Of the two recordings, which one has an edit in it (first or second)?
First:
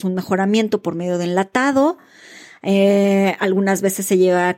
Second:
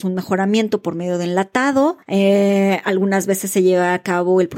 second